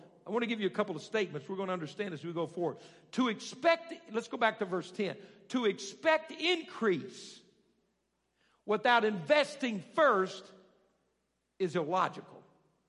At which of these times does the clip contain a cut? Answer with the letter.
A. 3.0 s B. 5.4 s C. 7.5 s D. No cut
D